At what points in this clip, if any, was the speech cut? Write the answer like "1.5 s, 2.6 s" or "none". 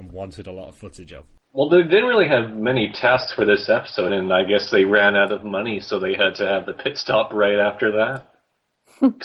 4.1 s